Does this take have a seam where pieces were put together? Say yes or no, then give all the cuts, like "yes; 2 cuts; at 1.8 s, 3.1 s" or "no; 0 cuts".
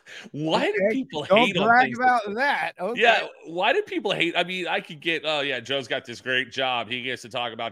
no; 0 cuts